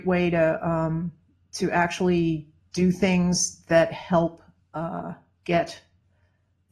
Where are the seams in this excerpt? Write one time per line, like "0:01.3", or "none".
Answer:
none